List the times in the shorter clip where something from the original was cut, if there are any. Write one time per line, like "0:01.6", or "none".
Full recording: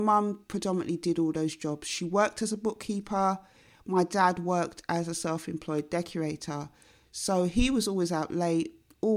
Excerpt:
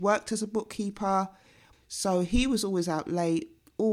0:01.7